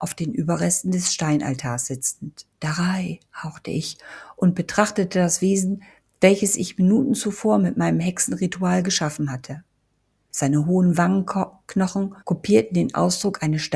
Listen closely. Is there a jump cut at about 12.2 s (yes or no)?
yes